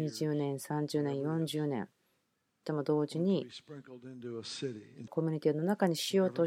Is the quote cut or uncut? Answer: cut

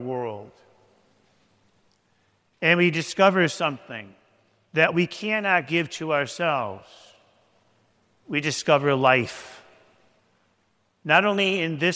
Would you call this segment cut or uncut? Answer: uncut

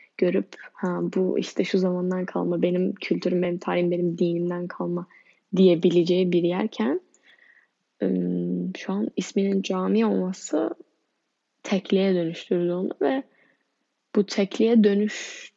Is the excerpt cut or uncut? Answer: uncut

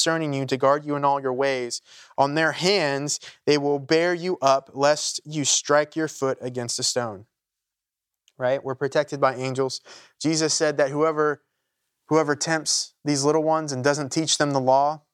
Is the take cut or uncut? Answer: uncut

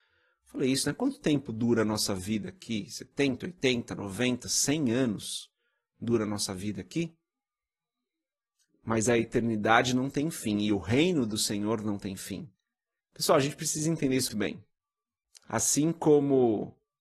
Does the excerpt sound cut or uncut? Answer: cut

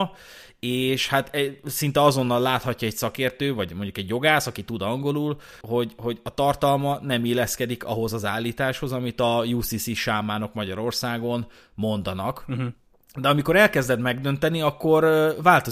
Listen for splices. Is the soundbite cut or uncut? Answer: cut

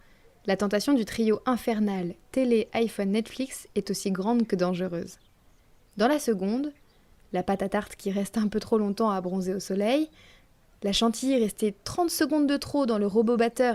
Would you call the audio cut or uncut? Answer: cut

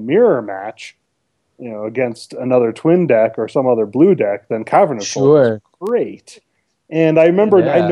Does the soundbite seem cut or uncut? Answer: uncut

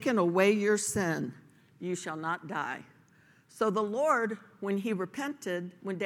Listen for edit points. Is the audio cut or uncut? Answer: uncut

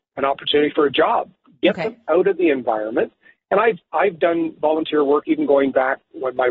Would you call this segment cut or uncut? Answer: uncut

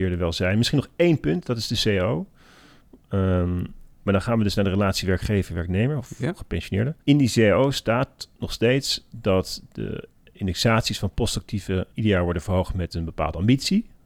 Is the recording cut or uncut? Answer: cut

